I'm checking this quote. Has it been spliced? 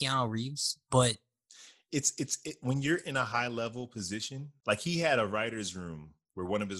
no; 0 cuts

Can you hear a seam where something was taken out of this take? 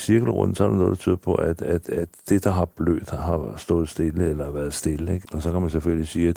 yes; 1 cut; at 5.2 s

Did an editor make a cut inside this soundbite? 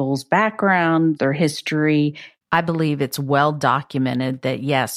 yes; 2 cuts; at 1.2 s, 2.4 s

